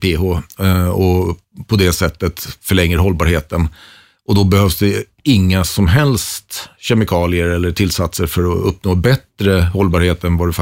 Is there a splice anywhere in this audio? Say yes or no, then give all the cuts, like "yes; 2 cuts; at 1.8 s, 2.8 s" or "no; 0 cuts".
no; 0 cuts